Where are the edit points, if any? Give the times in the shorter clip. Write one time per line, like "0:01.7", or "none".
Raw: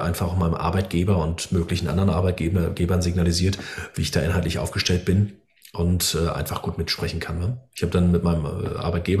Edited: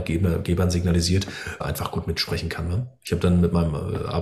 0:01.6